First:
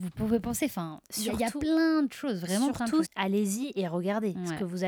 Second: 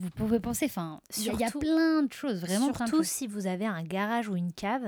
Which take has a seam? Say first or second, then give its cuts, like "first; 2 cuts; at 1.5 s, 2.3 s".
first; 1 cut; at 3.0 s